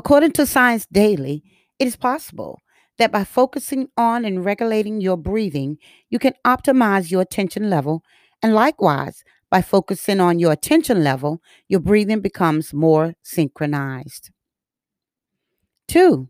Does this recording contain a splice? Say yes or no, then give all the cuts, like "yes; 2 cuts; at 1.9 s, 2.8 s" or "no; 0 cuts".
no; 0 cuts